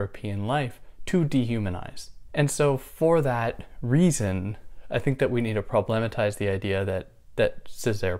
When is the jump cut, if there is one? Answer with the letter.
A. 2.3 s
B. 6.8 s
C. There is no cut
A